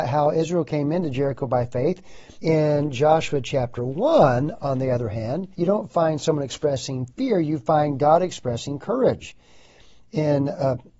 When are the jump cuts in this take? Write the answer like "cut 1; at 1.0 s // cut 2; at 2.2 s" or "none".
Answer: cut 1; at 2.4 s // cut 2; at 5.5 s